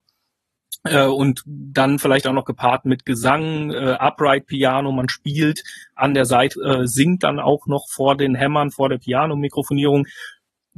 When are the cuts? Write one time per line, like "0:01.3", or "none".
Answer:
0:06.5